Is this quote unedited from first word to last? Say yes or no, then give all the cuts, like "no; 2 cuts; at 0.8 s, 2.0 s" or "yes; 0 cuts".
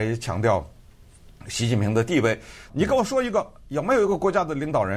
no; 1 cut; at 2.7 s